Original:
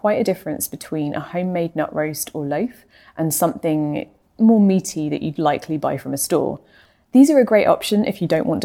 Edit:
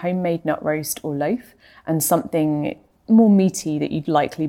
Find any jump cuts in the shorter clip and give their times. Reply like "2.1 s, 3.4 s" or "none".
none